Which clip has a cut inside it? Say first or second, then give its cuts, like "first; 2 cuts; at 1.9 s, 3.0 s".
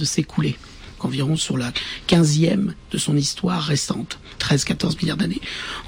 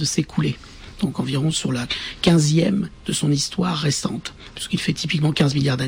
first; 2 cuts; at 1.0 s, 4.4 s